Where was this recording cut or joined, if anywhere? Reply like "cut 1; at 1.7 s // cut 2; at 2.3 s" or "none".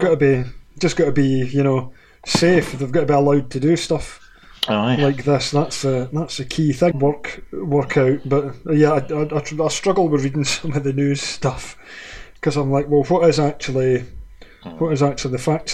cut 1; at 6.9 s